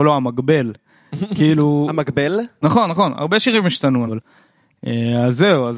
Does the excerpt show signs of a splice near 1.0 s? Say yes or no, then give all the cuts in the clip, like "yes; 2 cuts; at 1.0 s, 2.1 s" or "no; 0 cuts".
no; 2 cuts; at 2.6 s, 4.1 s